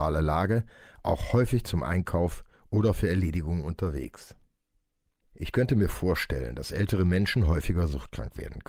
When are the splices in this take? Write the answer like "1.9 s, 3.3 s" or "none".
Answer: 5.2 s